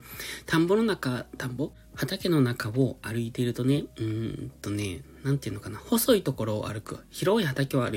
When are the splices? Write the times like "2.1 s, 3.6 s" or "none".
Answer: none